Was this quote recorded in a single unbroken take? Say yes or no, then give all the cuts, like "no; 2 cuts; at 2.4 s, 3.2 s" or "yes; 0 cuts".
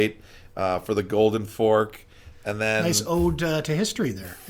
no; 1 cut; at 2.3 s